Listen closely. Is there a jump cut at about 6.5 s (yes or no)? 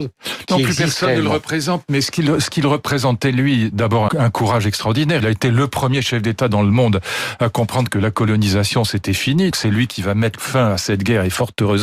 no